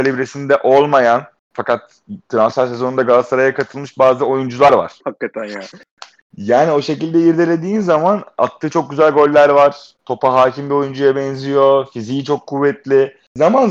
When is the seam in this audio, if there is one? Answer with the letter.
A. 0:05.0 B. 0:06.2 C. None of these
A